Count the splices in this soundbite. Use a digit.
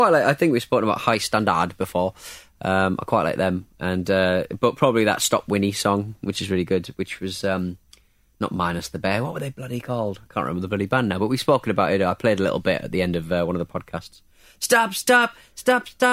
0